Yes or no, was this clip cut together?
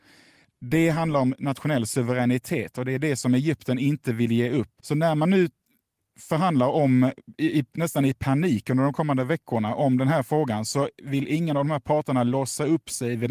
yes